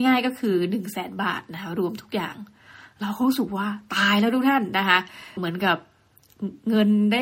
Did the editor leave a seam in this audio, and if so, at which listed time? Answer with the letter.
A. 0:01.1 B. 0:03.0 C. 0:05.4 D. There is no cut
C